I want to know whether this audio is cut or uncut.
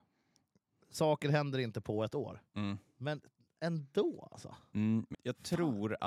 cut